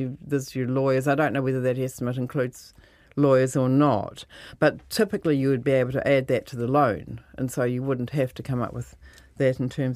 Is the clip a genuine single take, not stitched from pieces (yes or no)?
yes